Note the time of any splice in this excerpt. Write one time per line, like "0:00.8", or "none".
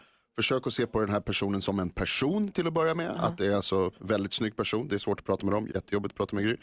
0:04.0
0:05.7